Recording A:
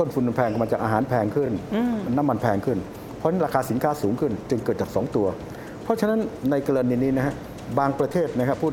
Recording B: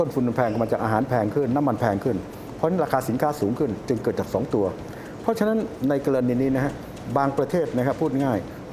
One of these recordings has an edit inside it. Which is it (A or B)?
B